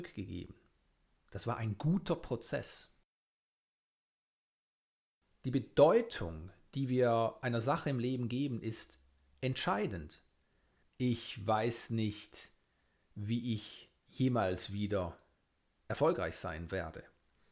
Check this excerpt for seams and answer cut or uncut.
cut